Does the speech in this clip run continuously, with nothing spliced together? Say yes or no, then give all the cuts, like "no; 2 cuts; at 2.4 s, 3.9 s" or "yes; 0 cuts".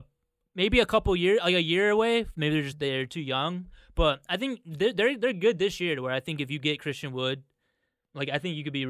no; 1 cut; at 2.7 s